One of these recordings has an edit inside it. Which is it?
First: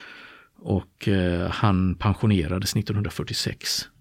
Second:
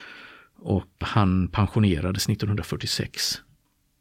second; 1 cut; at 1.0 s

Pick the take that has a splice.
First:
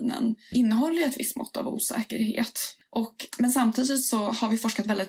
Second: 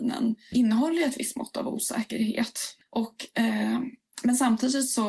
first; 1 cut; at 3.3 s

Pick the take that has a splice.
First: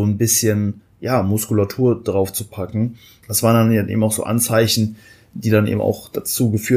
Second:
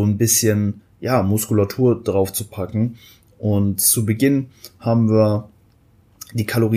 first; 1 cut; at 3.2 s

